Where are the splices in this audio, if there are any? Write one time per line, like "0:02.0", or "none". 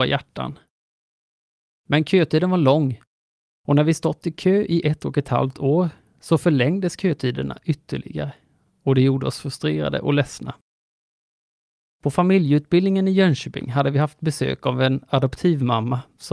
none